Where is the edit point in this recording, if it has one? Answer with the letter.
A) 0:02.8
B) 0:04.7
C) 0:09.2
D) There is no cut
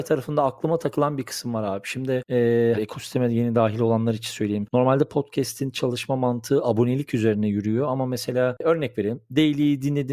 A